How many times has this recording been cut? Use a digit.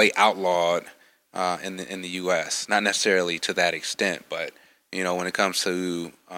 0